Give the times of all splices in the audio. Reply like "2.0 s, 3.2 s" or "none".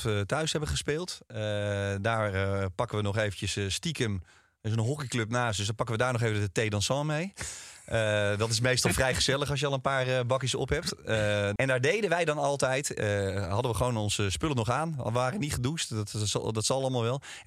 11.6 s